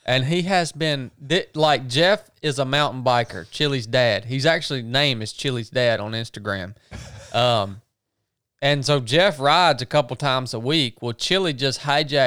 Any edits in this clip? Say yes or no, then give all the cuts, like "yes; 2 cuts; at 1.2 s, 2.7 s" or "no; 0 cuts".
no; 0 cuts